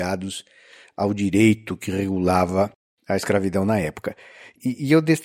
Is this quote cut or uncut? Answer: uncut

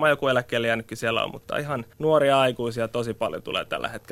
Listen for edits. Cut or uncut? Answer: cut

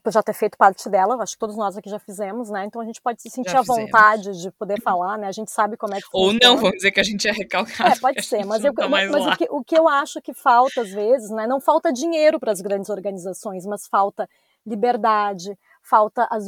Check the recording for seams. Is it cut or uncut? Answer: uncut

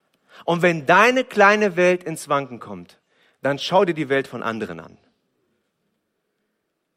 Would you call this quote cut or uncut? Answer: uncut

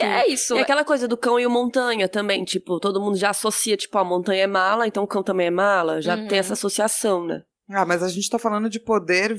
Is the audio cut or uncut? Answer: uncut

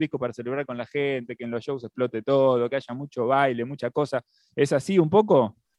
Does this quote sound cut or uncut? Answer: uncut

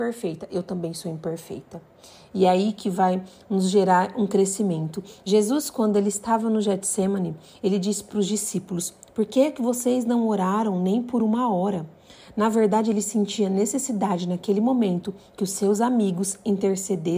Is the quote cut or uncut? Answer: uncut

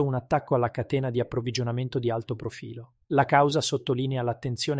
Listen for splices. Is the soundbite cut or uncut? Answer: cut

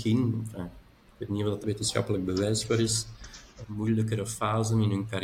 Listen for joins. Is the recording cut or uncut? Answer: cut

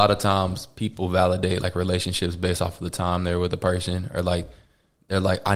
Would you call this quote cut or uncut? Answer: uncut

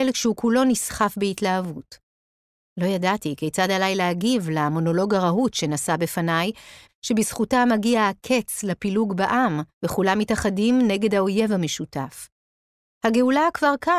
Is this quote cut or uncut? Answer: cut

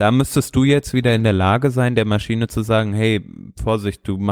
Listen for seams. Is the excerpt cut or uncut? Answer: uncut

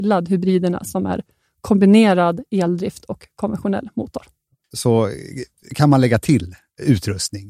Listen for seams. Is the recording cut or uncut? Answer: cut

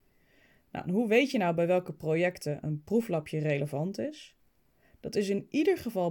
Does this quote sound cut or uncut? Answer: uncut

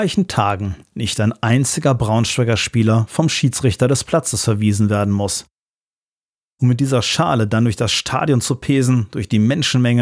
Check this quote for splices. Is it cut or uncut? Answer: cut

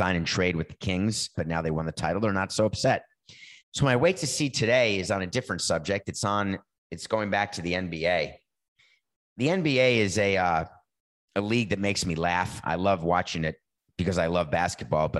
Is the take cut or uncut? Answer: cut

